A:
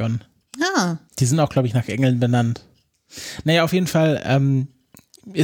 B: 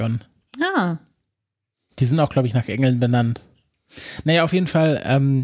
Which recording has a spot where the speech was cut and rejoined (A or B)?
A